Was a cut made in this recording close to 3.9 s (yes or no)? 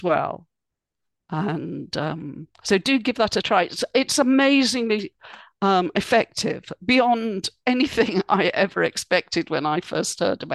no